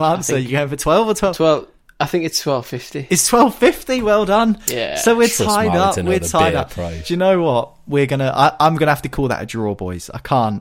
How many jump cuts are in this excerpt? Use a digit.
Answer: 0